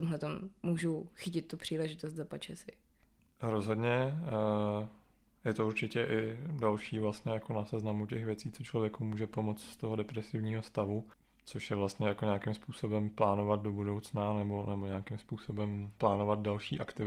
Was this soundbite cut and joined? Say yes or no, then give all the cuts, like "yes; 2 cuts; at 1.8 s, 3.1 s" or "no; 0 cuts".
yes; 1 cut; at 16.0 s